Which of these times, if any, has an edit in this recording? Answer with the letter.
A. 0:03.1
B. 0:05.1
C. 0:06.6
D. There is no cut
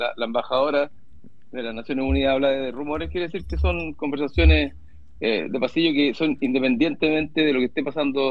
D